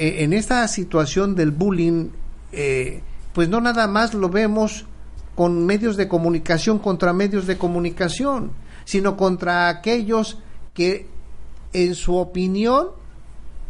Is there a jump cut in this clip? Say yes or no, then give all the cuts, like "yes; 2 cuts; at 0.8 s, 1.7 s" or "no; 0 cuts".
yes; 1 cut; at 3.3 s